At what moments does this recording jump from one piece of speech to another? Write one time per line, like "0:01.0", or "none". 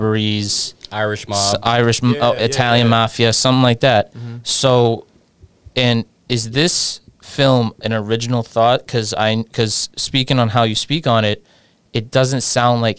none